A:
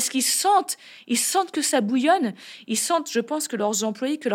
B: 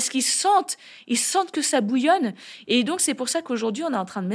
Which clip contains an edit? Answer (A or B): B